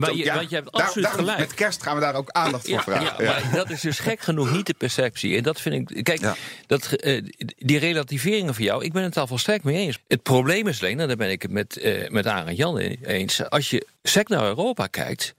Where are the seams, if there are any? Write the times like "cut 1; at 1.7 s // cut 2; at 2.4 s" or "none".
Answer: cut 1; at 10.0 s // cut 2; at 14.0 s